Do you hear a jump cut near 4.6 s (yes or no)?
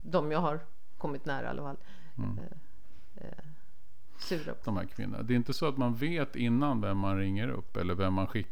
yes